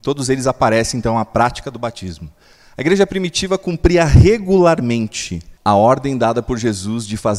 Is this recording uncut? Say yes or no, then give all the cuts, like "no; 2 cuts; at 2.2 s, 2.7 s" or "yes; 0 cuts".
no; 1 cut; at 5.6 s